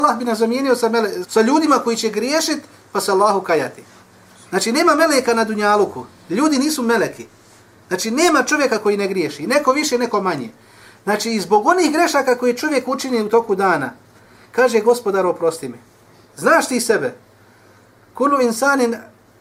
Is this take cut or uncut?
cut